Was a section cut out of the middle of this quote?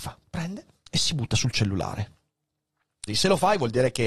yes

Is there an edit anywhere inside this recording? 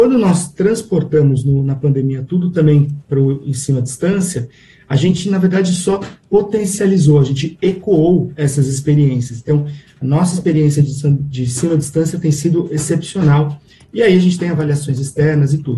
no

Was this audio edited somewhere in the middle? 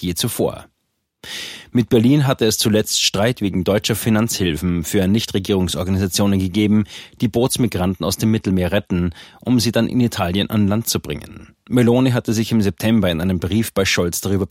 no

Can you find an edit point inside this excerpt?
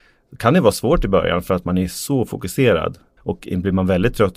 yes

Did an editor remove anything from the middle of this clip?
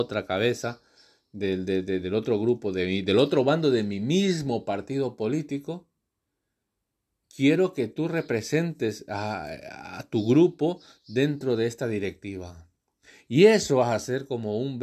no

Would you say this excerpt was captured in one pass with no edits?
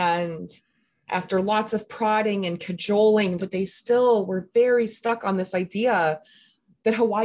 no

